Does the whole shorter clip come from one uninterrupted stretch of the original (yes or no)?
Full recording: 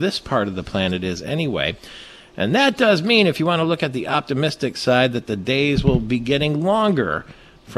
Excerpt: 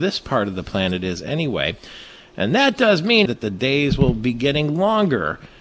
no